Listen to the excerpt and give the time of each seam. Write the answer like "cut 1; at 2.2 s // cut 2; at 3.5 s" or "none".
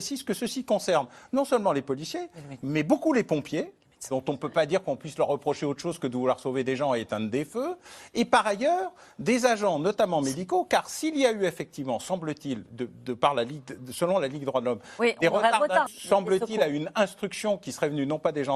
cut 1; at 15.9 s